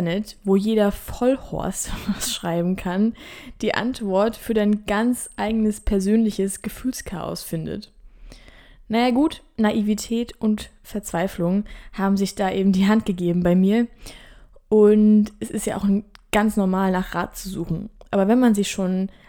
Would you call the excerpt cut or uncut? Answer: uncut